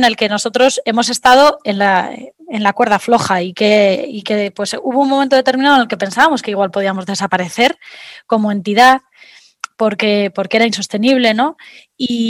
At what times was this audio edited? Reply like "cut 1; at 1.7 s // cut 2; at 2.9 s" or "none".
none